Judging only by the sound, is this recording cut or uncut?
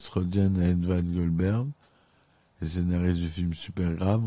uncut